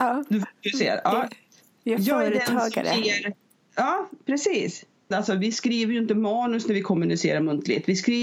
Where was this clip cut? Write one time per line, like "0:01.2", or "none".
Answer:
0:05.1

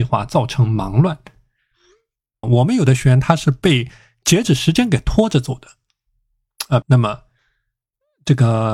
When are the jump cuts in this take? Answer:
0:02.4
0:06.8

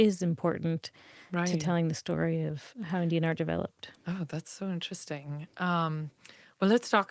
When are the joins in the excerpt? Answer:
none

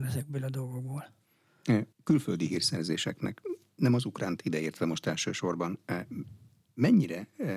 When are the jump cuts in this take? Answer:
0:01.9

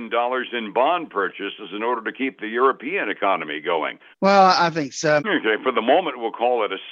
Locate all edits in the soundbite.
0:04.1
0:05.2

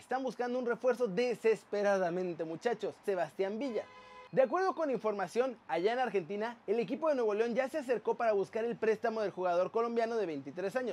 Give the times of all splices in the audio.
0:03.0

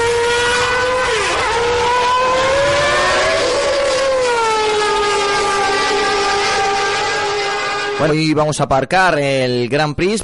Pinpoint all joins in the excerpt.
0:08.1

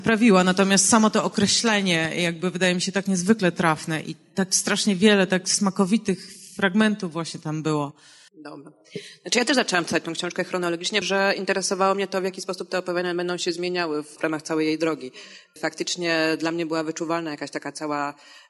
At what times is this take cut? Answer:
0:08.3
0:11.0

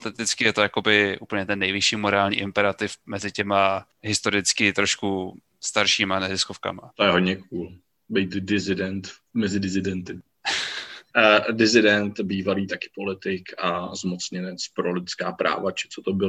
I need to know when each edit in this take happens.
0:11.1

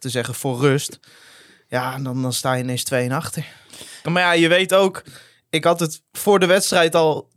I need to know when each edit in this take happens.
0:04.0

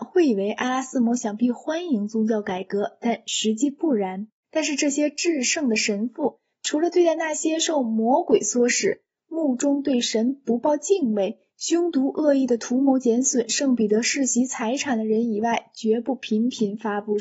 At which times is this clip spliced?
0:04.4

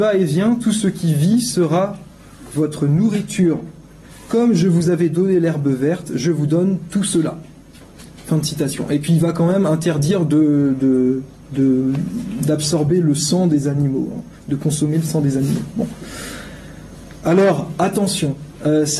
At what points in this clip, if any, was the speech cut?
none

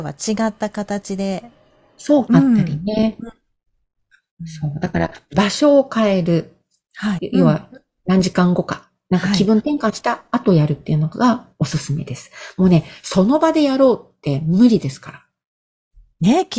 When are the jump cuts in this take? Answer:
0:02.3
0:07.2

